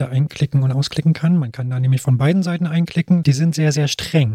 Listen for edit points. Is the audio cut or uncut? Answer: cut